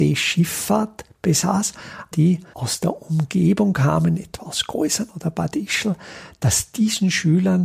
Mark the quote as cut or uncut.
cut